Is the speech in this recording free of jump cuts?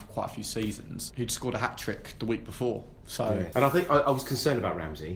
no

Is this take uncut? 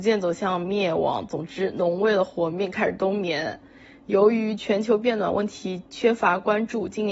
yes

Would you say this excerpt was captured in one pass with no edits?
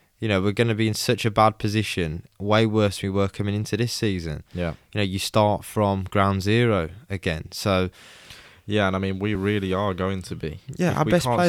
yes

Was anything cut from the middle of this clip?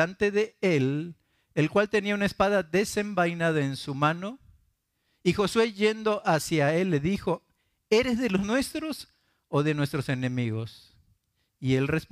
no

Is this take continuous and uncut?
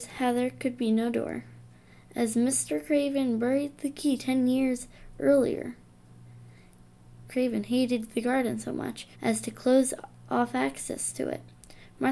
no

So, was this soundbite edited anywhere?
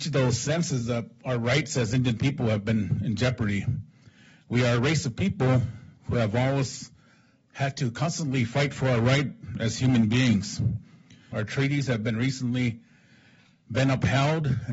yes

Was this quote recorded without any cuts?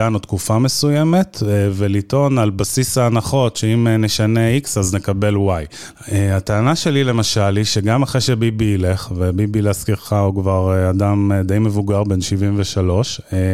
no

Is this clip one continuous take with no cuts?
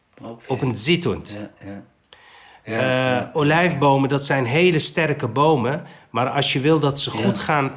yes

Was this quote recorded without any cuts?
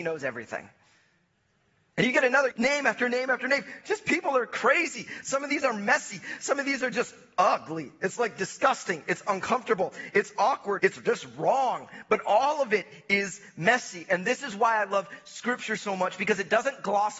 no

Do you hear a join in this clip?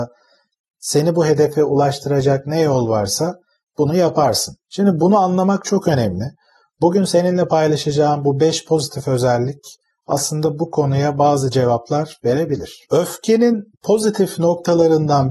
yes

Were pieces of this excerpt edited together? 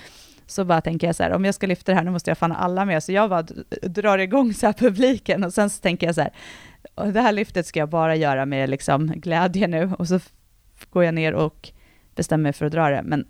no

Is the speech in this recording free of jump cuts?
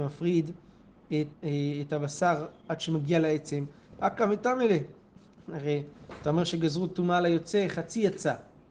no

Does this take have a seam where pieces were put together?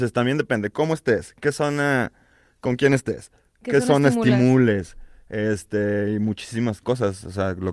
no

